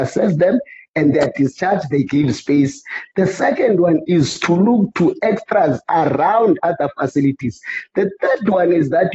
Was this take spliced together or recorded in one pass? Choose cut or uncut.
cut